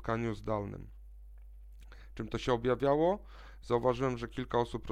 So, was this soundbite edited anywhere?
no; 0 cuts

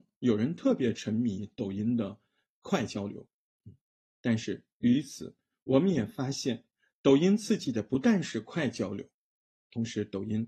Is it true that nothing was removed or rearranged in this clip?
no; 1 cut; at 9.5 s

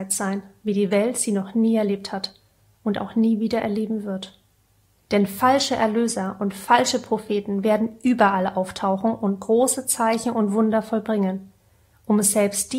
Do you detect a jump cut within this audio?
yes; 1 cut; at 4.9 s

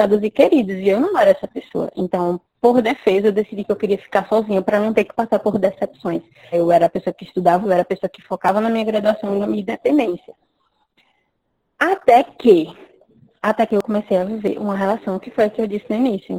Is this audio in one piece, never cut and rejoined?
no; 2 cuts; at 6.5 s, 7.6 s

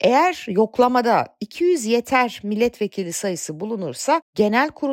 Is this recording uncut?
yes; 0 cuts

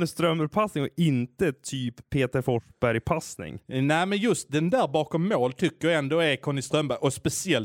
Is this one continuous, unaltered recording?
yes; 0 cuts

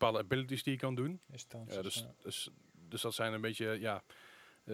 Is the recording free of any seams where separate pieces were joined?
yes; 0 cuts

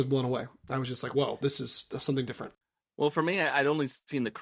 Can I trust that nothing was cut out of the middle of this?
yes; 0 cuts

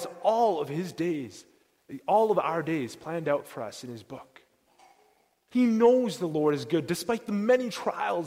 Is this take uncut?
no; 1 cut; at 5.5 s

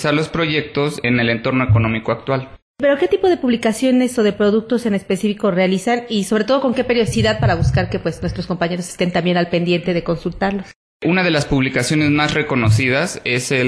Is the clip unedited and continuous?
yes; 0 cuts

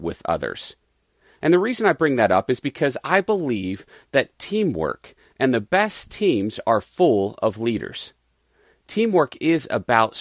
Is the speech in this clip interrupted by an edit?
no; 0 cuts

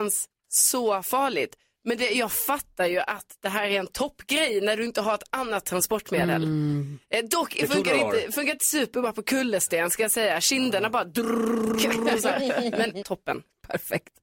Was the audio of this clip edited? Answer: yes; 1 cut; at 13.0 s

